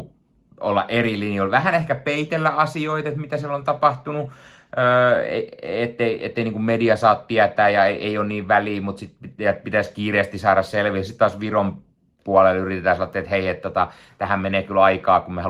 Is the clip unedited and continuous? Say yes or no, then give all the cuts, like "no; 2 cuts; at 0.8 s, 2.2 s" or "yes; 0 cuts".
yes; 0 cuts